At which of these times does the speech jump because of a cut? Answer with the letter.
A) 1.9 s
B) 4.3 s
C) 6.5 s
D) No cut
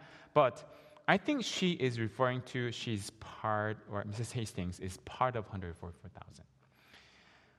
D